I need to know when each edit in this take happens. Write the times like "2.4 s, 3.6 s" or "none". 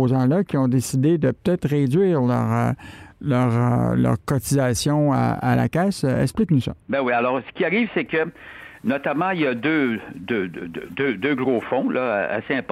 6.8 s